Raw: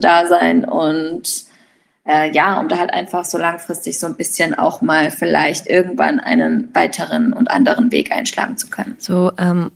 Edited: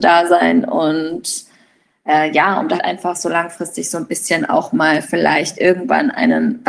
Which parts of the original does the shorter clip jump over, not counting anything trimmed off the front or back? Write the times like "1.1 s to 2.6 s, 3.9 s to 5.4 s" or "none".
2.8 s to 2.9 s